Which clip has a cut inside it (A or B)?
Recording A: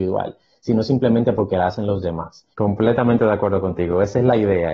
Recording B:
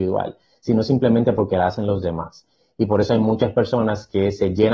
A